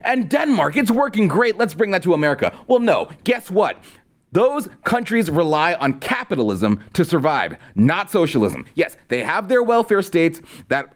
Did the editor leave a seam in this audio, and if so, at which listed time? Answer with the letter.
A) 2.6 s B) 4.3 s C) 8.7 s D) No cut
D